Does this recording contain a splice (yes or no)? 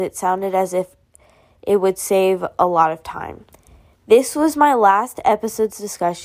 no